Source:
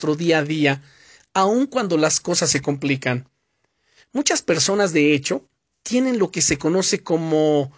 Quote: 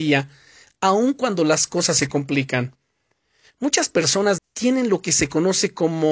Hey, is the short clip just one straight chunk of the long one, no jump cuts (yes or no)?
no